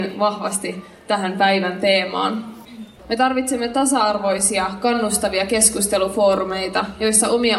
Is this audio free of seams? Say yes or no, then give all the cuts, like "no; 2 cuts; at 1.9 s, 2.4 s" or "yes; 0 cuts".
no; 1 cut; at 3.0 s